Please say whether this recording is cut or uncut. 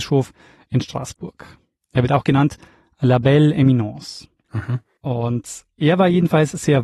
uncut